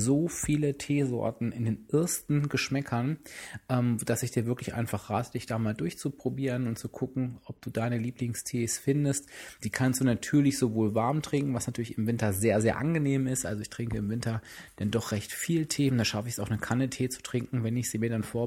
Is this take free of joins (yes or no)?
yes